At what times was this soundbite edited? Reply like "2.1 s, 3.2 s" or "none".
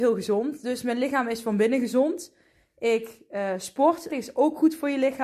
4.1 s